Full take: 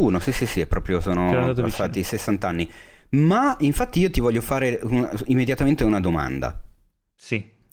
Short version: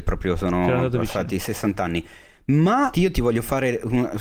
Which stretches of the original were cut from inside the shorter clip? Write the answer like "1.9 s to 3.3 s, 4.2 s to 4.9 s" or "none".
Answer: 3.6 s to 3.9 s